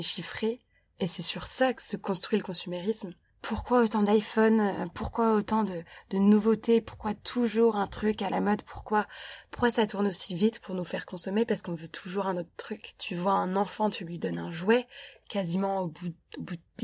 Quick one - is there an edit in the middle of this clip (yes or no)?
no